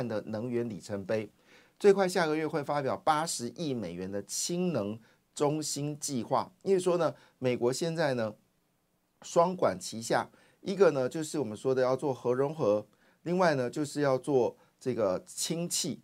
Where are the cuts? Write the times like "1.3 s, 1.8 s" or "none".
none